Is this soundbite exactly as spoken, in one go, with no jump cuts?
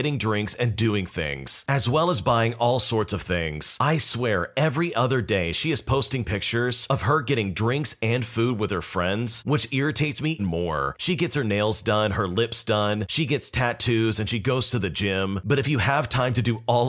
no; 1 cut; at 10.4 s

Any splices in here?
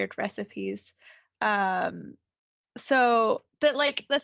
no; 0 cuts

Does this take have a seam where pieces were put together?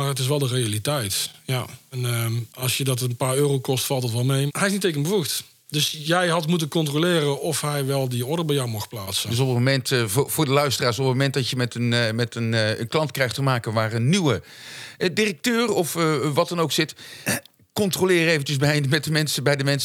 yes; 1 cut; at 4.5 s

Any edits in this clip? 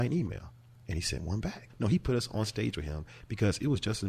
yes; 1 cut; at 1.7 s

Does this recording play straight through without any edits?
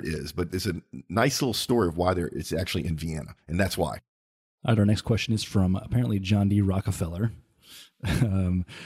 yes; 0 cuts

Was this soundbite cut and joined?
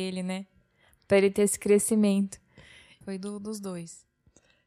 yes; 1 cut; at 3.0 s

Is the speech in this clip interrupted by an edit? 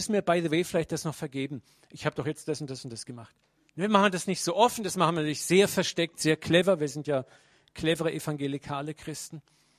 no; 0 cuts

